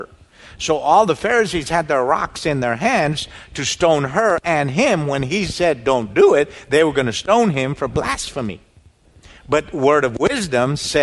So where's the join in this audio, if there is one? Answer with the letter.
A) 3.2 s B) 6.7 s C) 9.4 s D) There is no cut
D